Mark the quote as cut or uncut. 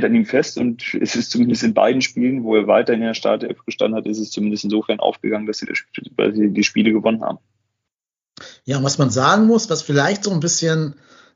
uncut